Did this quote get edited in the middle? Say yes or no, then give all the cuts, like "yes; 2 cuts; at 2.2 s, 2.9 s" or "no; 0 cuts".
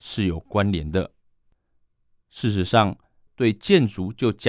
yes; 1 cut; at 3.3 s